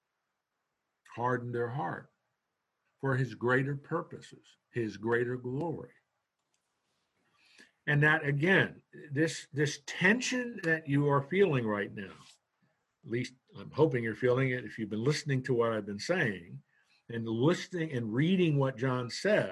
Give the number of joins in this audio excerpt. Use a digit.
0